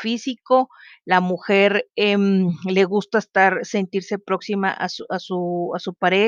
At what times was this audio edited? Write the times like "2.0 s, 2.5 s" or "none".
none